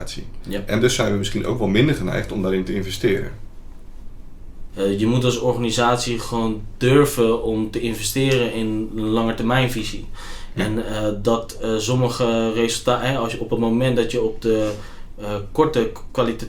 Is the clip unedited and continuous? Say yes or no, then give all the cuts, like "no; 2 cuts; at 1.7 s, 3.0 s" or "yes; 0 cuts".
no; 1 cut; at 4.7 s